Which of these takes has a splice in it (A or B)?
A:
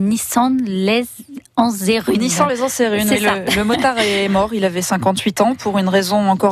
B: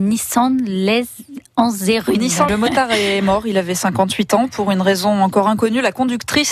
B